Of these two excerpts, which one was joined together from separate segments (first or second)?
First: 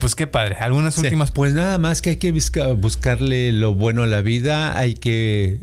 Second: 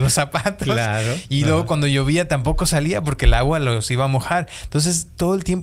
first